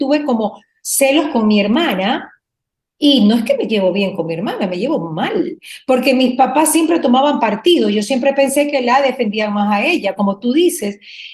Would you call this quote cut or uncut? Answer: uncut